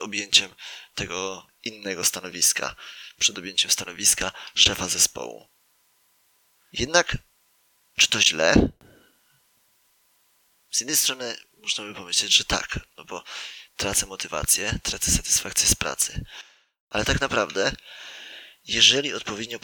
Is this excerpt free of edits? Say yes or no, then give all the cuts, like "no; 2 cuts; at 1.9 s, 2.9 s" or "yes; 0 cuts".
yes; 0 cuts